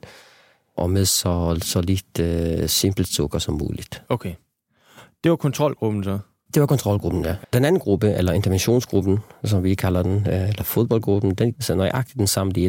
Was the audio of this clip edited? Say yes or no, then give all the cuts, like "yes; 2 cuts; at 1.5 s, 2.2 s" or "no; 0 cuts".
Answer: yes; 2 cuts; at 7.4 s, 11.5 s